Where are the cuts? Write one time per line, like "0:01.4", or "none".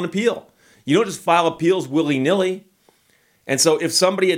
none